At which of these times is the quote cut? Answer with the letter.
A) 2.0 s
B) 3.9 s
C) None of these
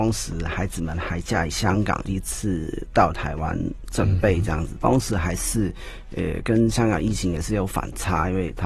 A